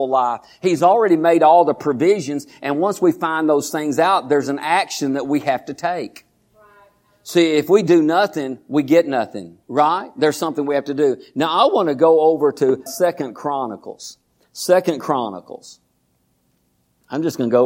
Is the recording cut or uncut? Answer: cut